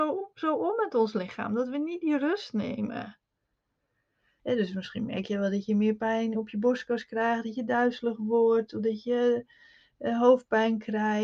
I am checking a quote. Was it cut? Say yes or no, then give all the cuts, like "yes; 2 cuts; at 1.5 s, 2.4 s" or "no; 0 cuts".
yes; 1 cut; at 4.4 s